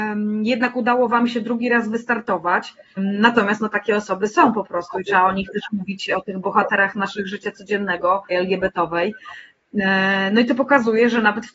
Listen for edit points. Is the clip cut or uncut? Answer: cut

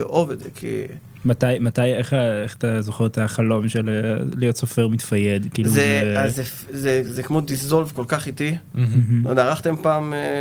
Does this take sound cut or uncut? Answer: uncut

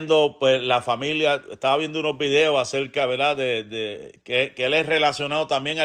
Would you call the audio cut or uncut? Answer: uncut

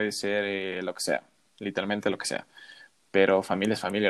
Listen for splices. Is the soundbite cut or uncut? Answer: uncut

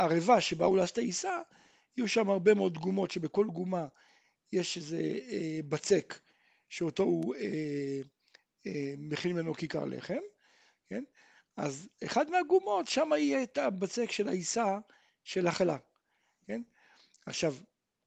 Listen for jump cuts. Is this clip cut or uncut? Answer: uncut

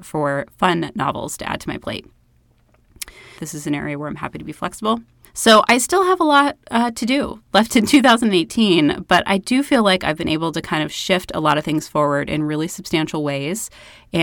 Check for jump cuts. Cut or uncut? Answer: cut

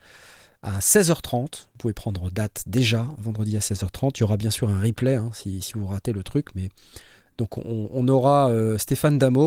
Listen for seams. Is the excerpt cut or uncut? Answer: uncut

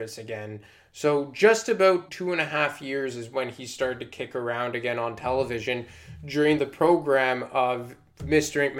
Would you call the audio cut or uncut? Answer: cut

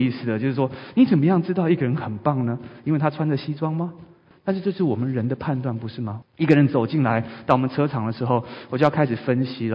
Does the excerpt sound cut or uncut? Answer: cut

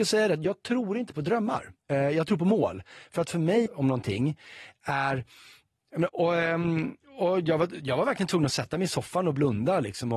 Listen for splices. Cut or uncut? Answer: cut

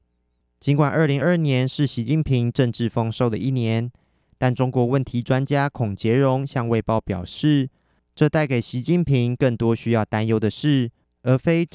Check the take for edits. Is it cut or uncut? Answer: cut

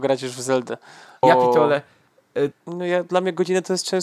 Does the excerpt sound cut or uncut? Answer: cut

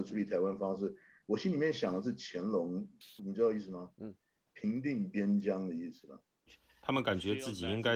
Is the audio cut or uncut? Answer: cut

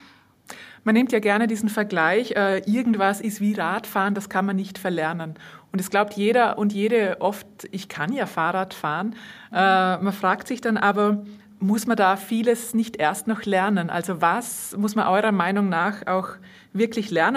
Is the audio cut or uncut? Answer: uncut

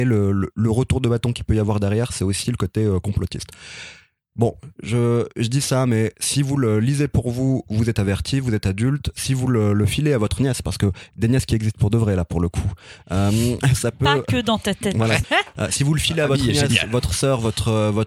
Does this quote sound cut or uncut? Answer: cut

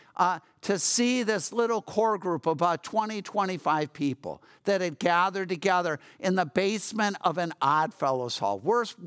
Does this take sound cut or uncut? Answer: uncut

